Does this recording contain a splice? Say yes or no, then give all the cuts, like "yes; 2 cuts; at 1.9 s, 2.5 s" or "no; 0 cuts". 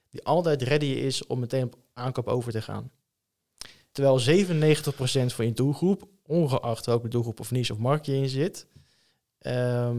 yes; 1 cut; at 3.9 s